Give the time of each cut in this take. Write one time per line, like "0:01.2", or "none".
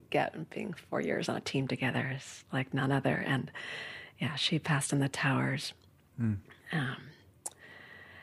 none